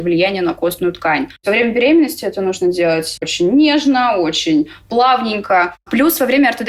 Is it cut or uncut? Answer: uncut